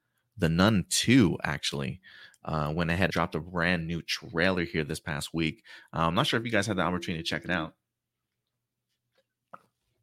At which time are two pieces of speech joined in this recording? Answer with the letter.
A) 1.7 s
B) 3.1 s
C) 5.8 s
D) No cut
B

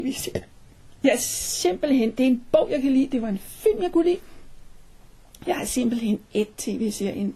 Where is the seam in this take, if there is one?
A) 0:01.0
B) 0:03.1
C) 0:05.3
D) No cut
D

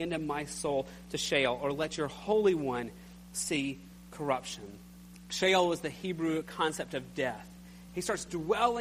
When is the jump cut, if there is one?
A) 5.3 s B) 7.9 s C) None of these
B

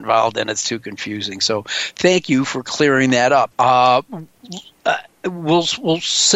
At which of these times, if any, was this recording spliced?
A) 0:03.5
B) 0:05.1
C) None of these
A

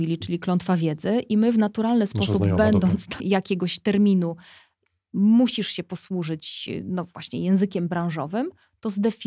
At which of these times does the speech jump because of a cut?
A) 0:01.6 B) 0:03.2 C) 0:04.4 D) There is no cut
B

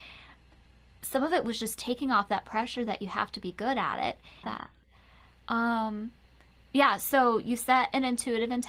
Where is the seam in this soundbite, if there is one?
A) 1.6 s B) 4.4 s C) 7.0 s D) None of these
B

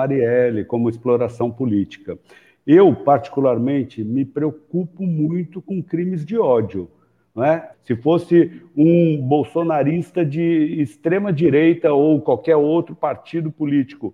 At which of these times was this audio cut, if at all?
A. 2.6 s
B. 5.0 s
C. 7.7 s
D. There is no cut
C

